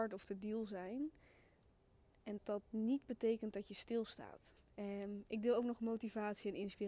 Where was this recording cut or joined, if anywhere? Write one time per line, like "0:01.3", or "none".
0:02.4
0:04.6